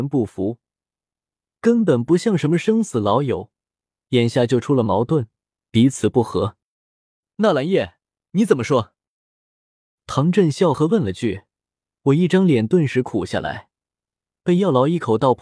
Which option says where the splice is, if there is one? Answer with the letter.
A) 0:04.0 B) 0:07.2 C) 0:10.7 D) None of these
C